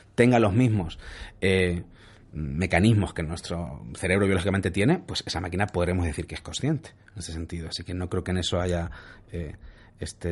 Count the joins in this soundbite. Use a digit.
0